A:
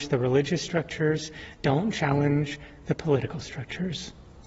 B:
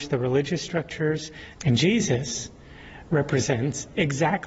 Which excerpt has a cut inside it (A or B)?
B